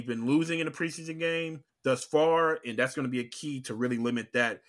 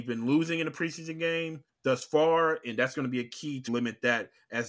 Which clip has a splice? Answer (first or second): second